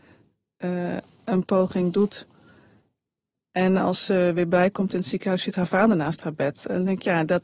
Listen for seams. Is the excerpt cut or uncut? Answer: uncut